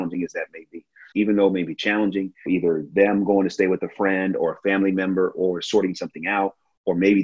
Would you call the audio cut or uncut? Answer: cut